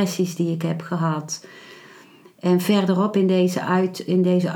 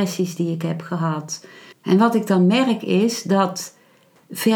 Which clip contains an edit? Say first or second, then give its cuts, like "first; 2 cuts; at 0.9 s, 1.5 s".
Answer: second; 1 cut; at 1.7 s